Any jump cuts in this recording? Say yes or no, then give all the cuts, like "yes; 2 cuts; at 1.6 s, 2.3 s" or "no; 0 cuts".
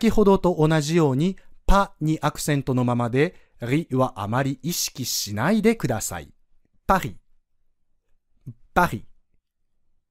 yes; 2 cuts; at 6.7 s, 8.6 s